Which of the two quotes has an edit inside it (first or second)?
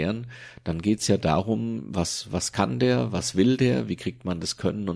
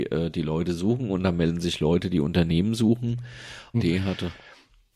second